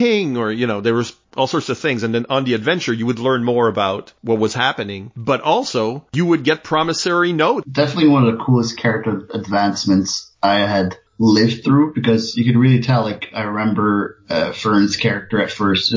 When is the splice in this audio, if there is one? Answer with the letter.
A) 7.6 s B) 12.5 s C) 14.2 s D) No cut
A